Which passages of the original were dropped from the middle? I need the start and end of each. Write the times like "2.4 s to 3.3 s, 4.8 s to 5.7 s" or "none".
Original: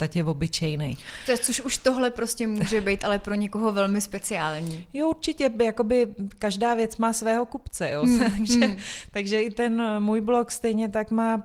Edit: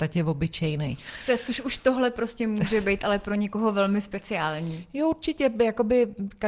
none